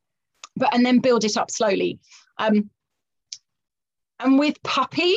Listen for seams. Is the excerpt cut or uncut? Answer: uncut